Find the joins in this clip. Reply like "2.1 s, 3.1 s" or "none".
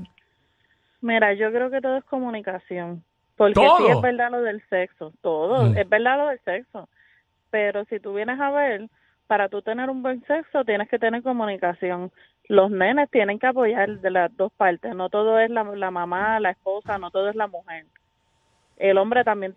none